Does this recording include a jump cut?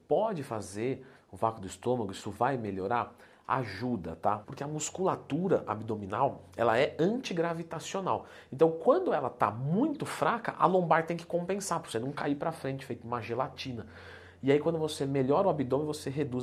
yes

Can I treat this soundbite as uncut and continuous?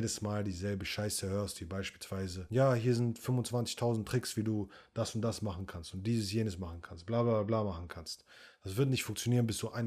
yes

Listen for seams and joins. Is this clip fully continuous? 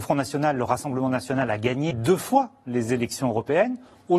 no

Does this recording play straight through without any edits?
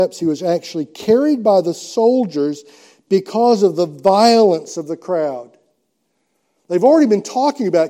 yes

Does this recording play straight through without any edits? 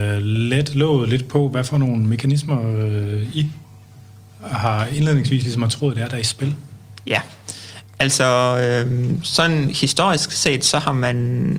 yes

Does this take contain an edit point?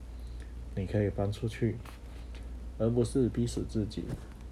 yes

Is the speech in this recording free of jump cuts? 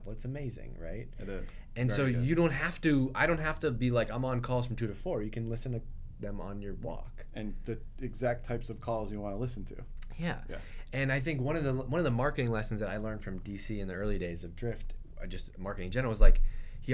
yes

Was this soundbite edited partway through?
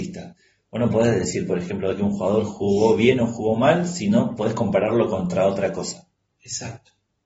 no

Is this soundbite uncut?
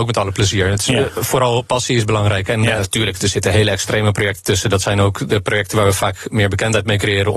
no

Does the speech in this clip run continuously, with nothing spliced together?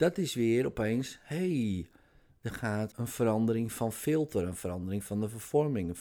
no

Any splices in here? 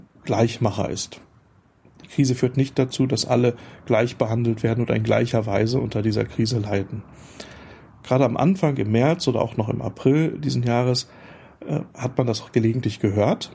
no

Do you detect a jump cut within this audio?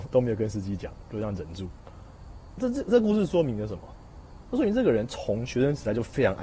no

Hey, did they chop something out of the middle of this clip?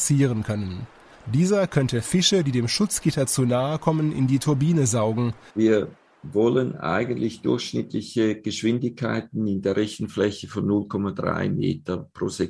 yes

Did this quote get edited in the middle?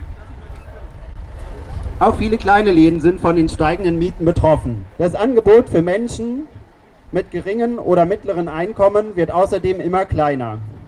yes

